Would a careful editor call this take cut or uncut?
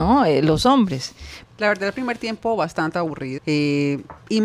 cut